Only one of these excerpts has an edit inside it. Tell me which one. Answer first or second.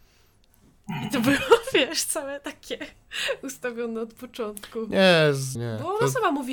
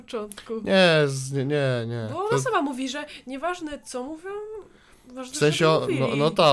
first